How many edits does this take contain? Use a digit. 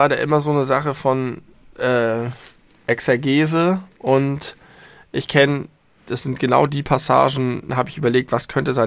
2